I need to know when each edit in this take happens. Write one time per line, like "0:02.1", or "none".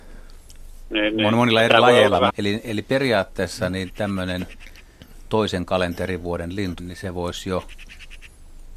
0:02.3
0:06.8